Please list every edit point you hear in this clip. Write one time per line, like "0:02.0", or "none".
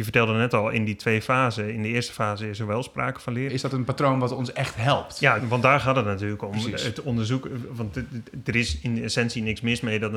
0:03.5
0:05.4